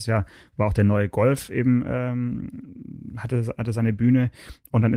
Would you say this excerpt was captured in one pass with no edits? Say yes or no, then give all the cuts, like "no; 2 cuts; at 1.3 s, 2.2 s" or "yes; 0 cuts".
yes; 0 cuts